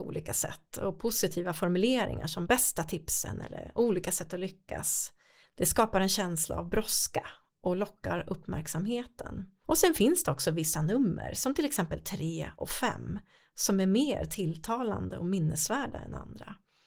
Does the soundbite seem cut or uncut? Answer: cut